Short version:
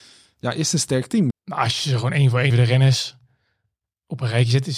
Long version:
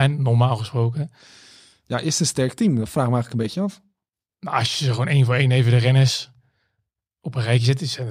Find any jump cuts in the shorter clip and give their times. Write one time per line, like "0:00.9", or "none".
0:01.3
0:02.5